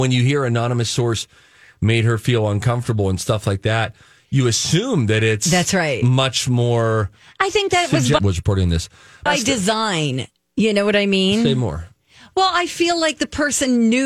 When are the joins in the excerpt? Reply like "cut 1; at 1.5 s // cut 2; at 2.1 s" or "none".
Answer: cut 1; at 8.2 s // cut 2; at 9.3 s